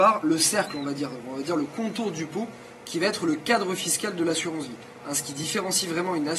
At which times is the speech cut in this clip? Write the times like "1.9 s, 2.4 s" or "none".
none